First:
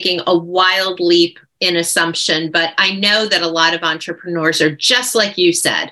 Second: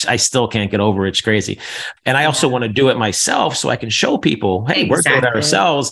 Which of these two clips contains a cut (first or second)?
second